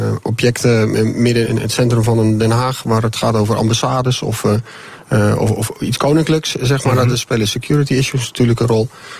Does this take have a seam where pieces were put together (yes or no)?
yes